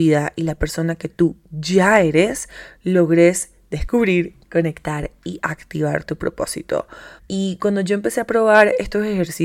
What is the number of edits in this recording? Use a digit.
1